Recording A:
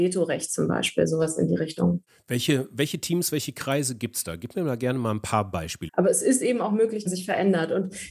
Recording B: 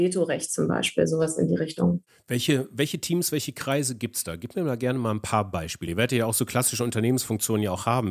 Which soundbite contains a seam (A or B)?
A